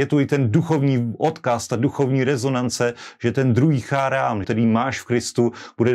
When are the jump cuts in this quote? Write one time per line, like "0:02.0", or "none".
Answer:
0:04.4